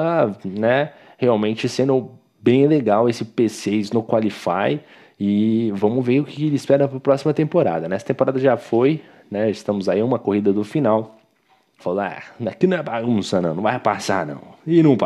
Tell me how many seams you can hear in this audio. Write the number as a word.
one